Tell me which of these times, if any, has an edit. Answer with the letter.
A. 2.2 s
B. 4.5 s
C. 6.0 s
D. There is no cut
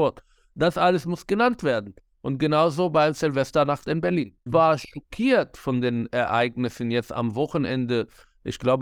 B